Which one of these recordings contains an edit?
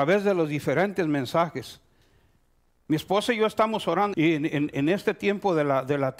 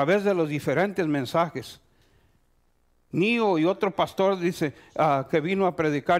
first; 2 cuts; at 2.8 s, 4.1 s

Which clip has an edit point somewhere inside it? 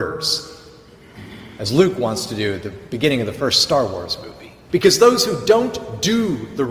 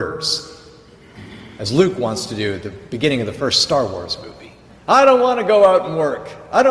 first; 1 cut; at 4.7 s

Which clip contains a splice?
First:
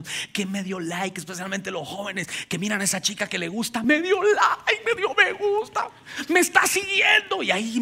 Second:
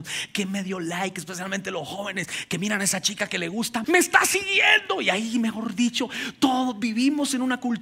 second; 1 cut; at 3.8 s

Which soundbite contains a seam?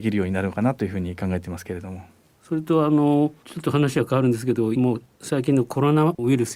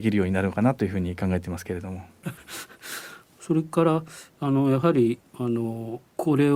second; 1 cut; at 2.2 s

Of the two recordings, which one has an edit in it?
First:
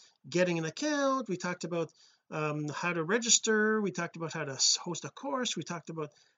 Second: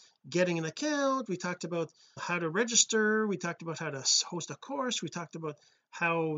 second; 1 cut; at 2.2 s

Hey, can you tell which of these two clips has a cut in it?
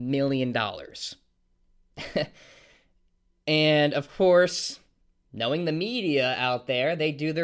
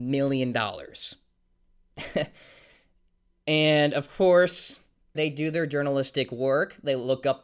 second; 1 cut; at 5.1 s

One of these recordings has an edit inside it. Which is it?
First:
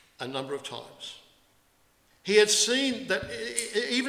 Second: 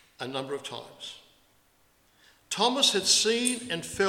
first; 1 cut; at 2.1 s

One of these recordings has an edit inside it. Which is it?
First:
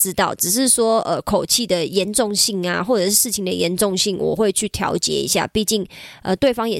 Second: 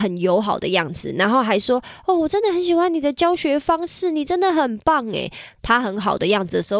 second; 1 cut; at 5.6 s

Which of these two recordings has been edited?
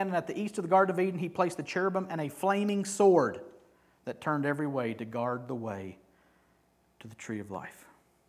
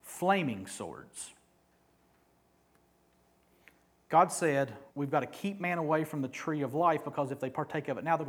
second; 1 cut; at 4.9 s

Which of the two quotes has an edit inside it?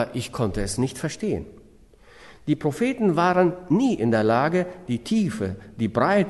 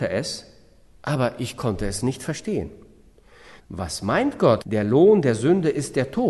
second; 2 cuts; at 3.6 s, 4.6 s

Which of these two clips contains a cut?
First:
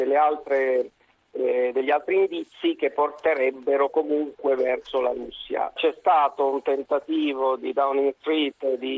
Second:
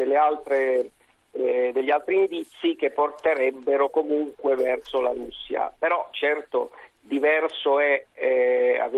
first; 1 cut; at 5.8 s

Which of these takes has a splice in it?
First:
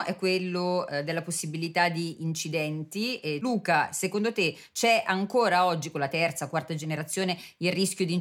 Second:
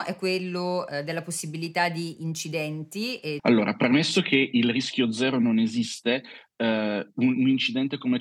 second; 1 cut; at 3.4 s

